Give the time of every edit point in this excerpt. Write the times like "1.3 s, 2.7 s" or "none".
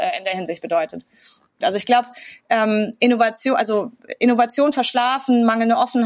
1.6 s